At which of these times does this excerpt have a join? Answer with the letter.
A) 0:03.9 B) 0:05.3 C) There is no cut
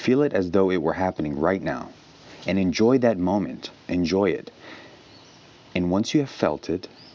A